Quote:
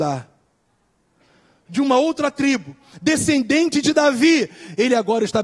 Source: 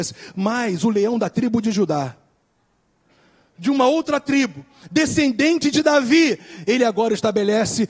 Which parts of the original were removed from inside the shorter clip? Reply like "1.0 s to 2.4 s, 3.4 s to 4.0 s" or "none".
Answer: none